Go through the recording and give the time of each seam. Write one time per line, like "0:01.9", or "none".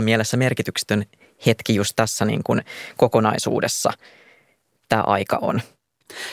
none